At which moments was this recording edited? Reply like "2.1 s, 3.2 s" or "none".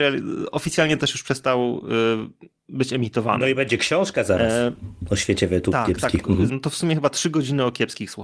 6.5 s